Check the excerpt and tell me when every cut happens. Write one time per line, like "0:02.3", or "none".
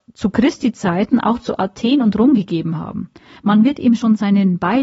0:03.4